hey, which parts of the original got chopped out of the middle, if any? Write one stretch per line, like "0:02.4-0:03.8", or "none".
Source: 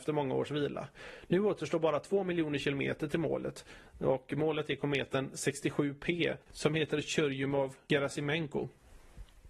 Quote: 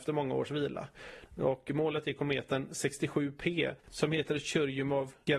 0:01.3-0:03.9